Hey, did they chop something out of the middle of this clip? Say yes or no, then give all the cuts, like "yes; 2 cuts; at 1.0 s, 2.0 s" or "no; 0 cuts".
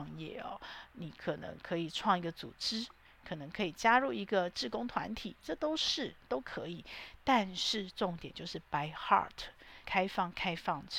yes; 1 cut; at 9.8 s